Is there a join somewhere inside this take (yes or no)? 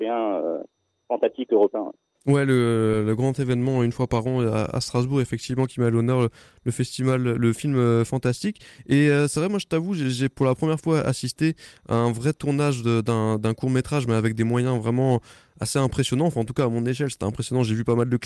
no